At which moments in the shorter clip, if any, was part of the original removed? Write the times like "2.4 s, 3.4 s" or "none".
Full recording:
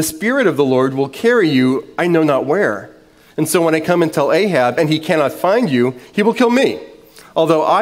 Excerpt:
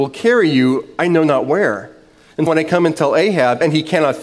2.5 s